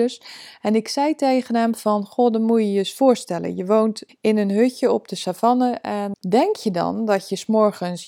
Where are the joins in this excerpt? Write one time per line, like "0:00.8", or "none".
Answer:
0:04.1
0:06.1